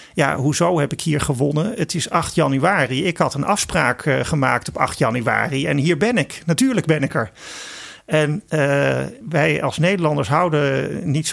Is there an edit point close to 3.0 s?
no; 1 cut; at 9.2 s

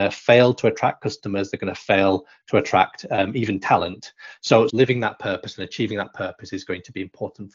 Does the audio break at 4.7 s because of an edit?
yes; 1 cut; at 4.7 s

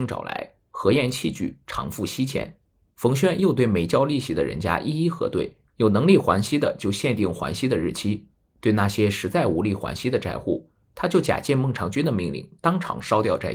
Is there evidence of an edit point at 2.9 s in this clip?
yes; 2 cuts; at 2.9 s, 5.7 s

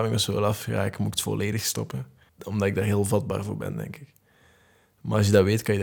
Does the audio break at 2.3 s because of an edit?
yes; 1 cut; at 2.3 s

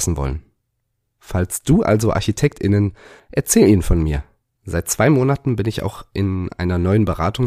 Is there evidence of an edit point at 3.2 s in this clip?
yes; 2 cuts; at 3.2 s, 4.6 s

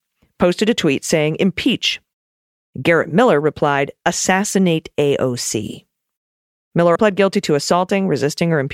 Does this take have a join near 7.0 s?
yes; 1 cut; at 7.0 s

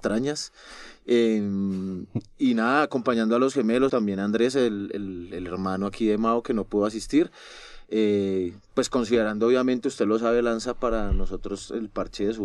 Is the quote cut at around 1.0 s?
no; 1 cut; at 3.9 s

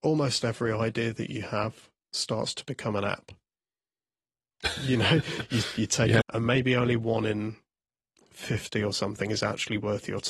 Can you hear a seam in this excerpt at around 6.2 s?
yes; 1 cut; at 6.2 s

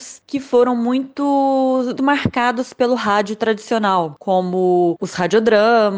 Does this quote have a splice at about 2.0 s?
yes; 1 cut; at 2.0 s

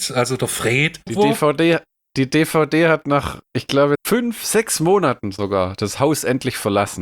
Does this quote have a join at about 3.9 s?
yes; 2 cuts; at 1.1 s, 3.9 s

